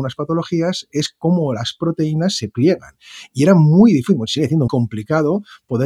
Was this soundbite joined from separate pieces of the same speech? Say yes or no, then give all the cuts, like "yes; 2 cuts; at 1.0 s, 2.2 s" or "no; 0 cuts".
yes; 1 cut; at 4.7 s